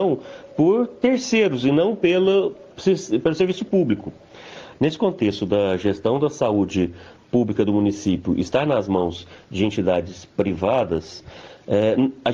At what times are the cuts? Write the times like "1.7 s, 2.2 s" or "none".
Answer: 4.7 s